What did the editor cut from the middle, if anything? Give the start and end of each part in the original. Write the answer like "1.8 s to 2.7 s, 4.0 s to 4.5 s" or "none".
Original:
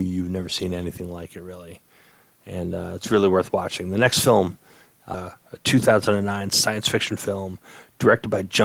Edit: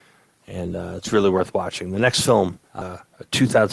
4.6 s to 5.0 s